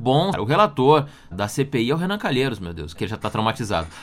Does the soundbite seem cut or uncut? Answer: cut